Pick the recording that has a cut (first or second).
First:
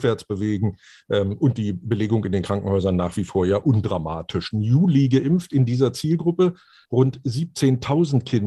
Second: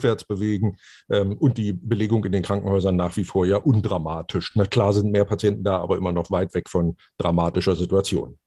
first